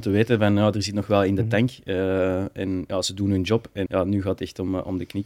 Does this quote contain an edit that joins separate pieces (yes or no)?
yes